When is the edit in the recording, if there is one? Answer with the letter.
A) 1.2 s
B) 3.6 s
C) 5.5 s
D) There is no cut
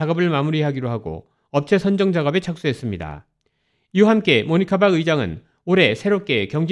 D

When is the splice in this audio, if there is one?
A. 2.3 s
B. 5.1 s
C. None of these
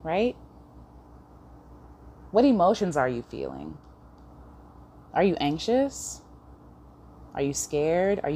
B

